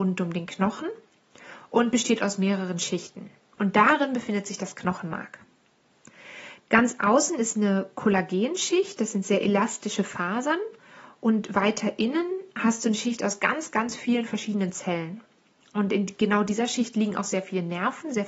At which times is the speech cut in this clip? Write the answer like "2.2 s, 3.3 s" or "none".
3.5 s, 6.6 s